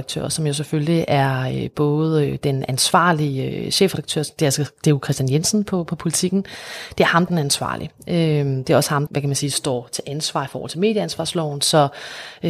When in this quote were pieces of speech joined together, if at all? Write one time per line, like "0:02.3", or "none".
0:07.3
0:09.1